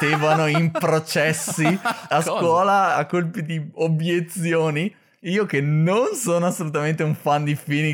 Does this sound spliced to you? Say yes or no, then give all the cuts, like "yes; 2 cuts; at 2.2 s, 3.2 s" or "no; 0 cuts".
no; 0 cuts